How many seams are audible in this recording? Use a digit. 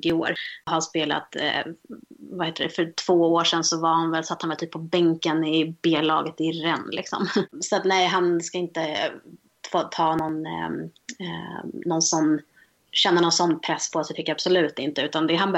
0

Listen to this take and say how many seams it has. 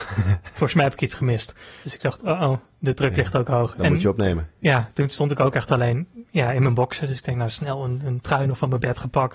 1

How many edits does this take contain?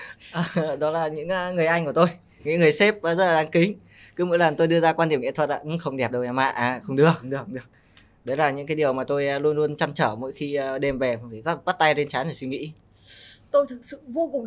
0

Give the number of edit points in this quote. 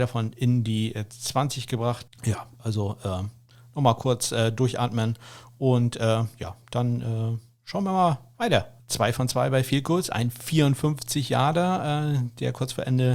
2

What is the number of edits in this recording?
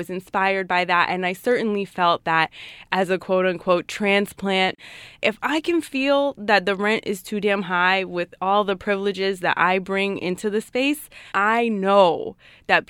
1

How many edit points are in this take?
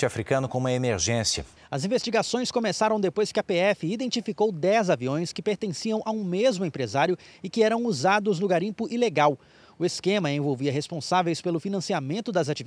1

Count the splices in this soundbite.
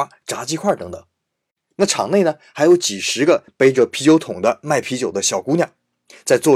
0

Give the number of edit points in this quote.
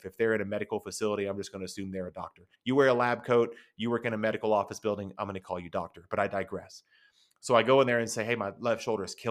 1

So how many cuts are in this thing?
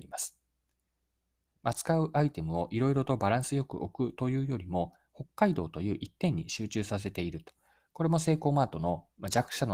1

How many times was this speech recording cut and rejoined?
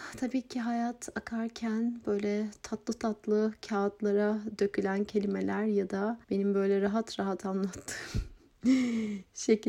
1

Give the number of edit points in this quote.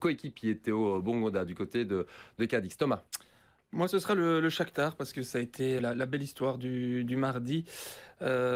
1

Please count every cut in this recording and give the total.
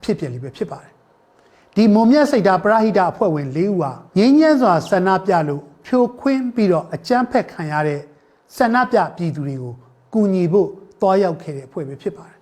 1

